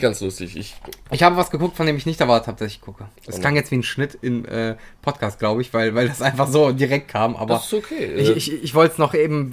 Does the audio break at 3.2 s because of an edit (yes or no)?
yes